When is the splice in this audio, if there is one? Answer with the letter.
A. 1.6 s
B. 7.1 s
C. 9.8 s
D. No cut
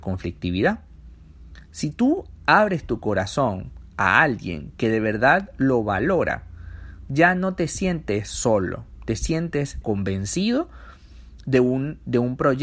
C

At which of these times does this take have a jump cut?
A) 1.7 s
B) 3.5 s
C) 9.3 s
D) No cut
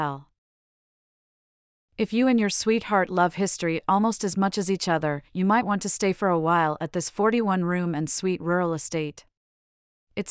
D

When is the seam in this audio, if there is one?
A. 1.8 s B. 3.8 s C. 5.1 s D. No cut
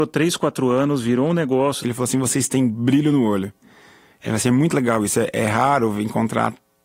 A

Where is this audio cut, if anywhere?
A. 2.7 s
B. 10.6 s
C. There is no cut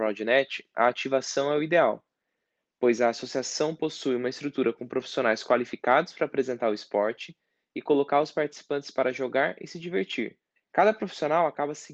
B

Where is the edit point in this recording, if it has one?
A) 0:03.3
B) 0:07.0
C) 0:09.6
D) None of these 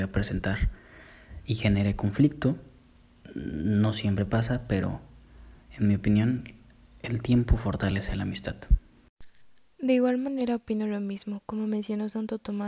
D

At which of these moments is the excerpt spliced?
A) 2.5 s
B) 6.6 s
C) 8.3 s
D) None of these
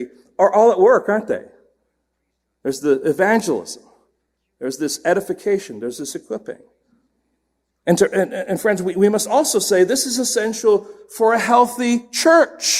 D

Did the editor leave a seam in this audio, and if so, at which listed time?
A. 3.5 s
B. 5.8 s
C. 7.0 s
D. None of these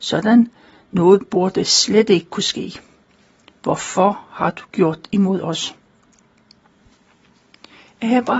D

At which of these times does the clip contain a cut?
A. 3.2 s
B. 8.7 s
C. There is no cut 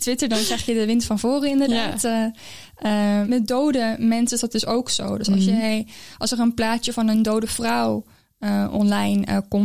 A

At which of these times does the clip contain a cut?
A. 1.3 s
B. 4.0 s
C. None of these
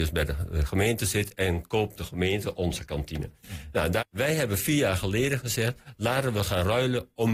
B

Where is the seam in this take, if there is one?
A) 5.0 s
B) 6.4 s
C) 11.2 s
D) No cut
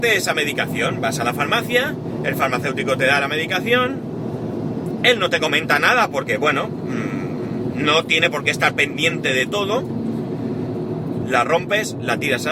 C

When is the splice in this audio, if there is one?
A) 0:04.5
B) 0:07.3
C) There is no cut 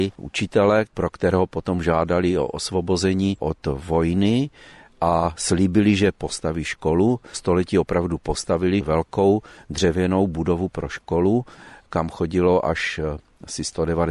B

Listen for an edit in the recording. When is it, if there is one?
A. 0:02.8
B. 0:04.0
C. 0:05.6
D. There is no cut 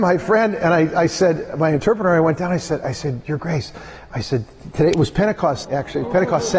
C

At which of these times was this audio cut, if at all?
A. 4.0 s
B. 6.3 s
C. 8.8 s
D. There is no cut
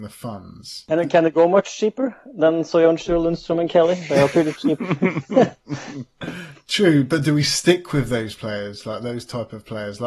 D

